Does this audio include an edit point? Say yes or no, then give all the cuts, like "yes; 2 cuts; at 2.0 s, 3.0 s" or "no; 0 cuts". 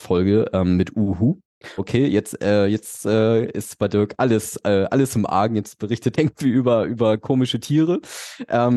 yes; 2 cuts; at 1.8 s, 6.1 s